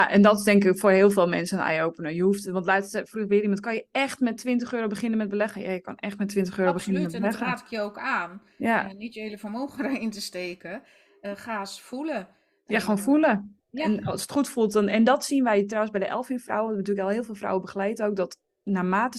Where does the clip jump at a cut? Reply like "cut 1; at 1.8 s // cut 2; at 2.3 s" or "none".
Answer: none